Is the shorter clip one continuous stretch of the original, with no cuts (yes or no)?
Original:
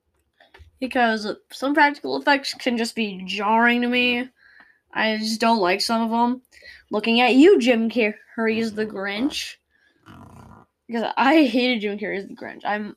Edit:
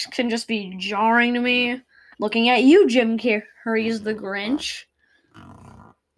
no